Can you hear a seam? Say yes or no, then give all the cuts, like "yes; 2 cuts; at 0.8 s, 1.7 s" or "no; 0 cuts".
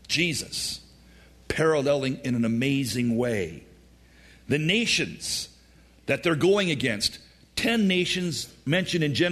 no; 0 cuts